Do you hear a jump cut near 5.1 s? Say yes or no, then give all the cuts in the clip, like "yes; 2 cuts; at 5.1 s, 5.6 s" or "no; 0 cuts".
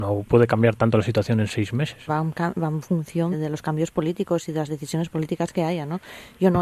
no; 2 cuts; at 2.1 s, 3.3 s